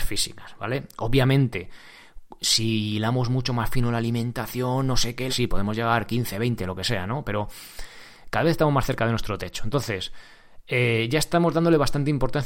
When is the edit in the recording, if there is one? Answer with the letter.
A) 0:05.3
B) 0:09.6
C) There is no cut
A